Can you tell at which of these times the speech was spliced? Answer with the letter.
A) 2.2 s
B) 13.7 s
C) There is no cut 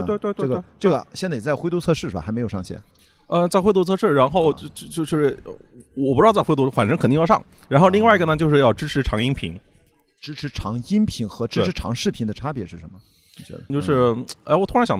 B